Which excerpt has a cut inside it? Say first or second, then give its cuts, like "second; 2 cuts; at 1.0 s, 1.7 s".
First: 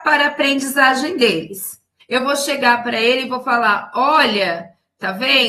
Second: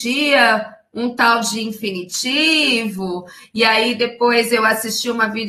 first; 1 cut; at 2.0 s